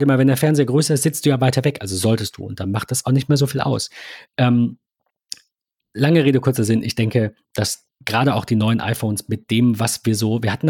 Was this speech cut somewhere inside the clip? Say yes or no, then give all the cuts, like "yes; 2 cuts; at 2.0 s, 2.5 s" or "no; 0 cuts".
yes; 1 cut; at 7.9 s